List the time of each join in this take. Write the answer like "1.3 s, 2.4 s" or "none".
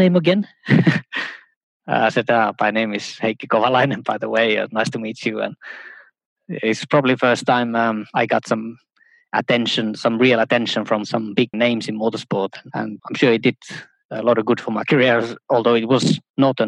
11.5 s, 13.0 s